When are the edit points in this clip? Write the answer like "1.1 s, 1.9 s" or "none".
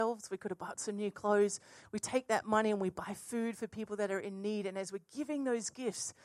none